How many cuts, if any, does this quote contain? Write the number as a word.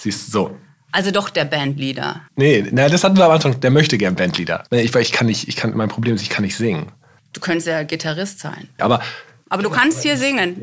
two